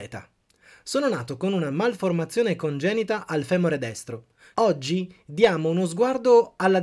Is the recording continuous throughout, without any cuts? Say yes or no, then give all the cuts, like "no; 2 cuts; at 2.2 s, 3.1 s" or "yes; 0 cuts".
no; 1 cut; at 4.5 s